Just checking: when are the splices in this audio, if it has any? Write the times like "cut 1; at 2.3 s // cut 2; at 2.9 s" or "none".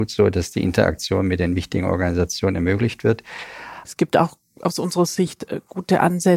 cut 1; at 3.8 s

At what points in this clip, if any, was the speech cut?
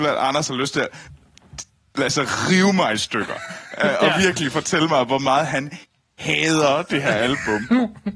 none

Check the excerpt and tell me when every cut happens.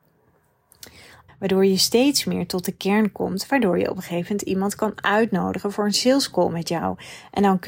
cut 1; at 1.3 s

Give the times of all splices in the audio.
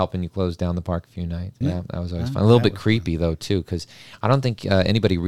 cut 1; at 1.6 s

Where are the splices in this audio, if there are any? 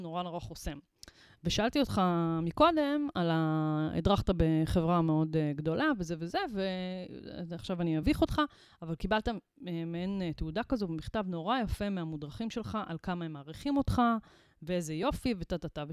none

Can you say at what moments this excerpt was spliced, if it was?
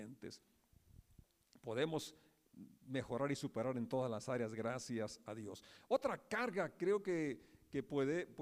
none

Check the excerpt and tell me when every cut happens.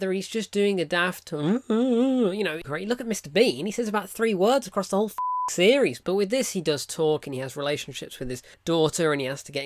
cut 1; at 2.6 s

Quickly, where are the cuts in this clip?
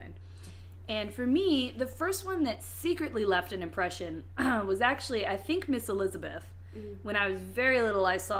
none

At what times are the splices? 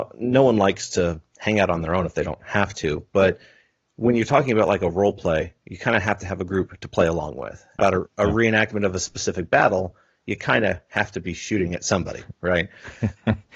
cut 1; at 7.8 s

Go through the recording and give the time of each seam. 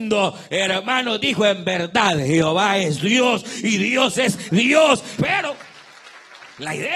cut 1; at 5.2 s

